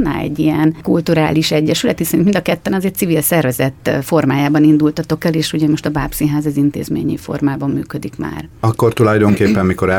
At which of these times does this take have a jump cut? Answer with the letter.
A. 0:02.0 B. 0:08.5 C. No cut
C